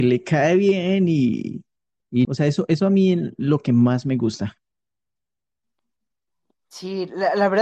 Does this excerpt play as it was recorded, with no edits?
no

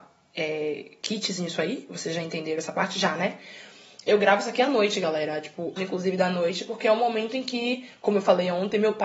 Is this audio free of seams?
no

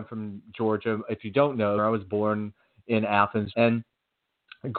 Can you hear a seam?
yes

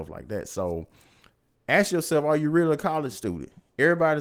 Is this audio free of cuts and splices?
yes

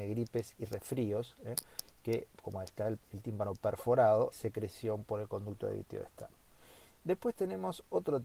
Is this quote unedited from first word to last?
no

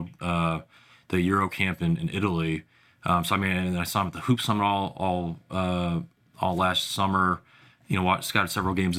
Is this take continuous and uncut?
yes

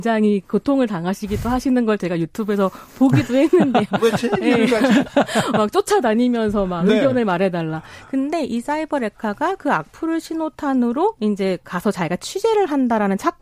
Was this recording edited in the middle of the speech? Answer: no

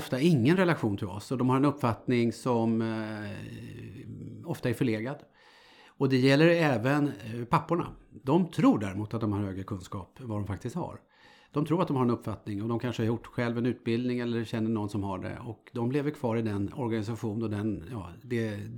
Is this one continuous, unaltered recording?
yes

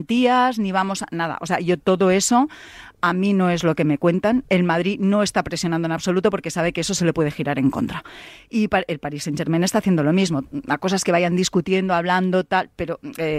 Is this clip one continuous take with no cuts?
yes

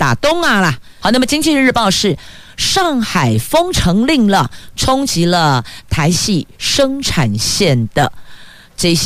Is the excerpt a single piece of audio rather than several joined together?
no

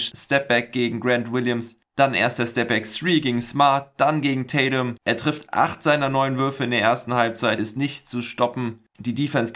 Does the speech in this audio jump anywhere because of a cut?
yes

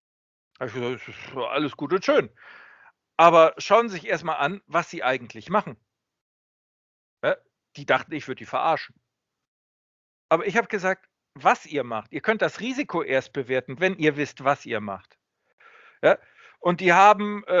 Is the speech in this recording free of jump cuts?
no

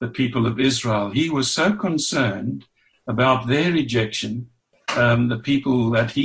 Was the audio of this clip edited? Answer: no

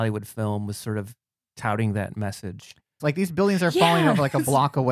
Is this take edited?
yes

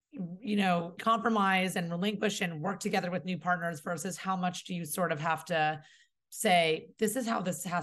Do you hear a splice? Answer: yes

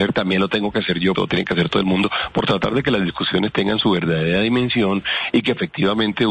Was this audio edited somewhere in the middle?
yes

